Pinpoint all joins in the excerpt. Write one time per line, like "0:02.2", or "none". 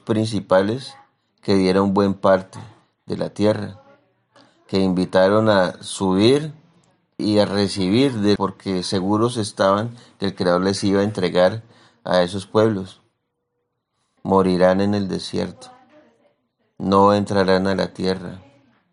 0:07.2
0:08.4
0:14.2